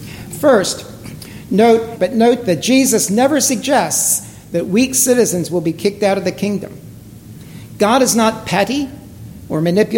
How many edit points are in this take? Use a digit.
1